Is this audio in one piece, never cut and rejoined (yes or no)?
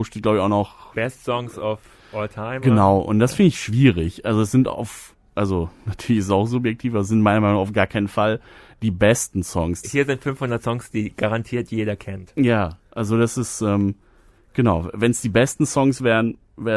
no